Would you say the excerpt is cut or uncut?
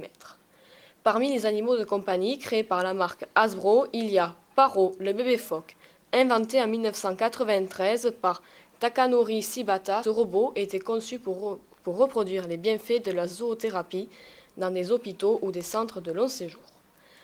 cut